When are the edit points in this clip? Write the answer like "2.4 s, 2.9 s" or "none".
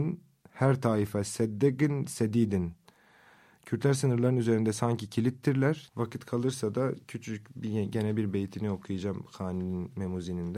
5.9 s